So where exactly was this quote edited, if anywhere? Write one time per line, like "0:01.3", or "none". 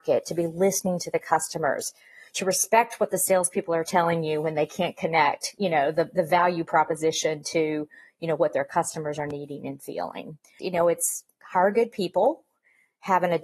0:10.6

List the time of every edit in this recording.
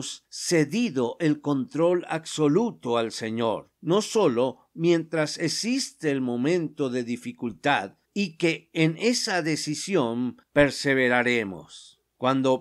0:08.0

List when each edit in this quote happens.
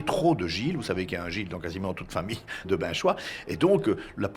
0:02.6

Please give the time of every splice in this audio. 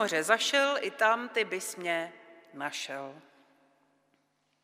none

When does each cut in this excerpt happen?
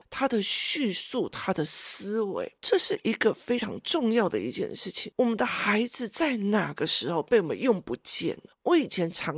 none

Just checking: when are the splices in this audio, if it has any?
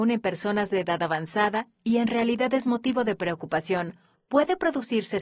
0:04.1

